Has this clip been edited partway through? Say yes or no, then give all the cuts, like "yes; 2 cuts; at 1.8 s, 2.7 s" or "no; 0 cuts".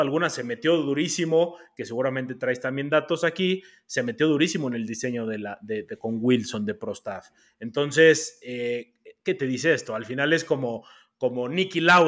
no; 0 cuts